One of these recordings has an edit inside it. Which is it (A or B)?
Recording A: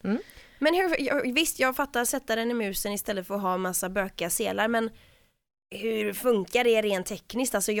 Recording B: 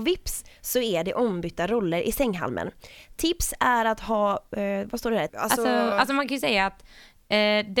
B